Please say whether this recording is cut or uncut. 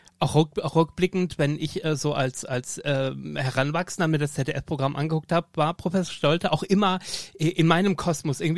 uncut